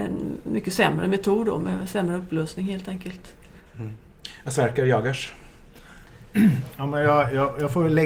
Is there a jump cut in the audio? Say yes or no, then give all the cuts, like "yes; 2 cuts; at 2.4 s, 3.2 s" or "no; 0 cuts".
no; 0 cuts